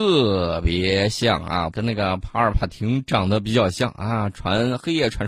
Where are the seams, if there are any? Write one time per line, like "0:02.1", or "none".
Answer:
0:01.7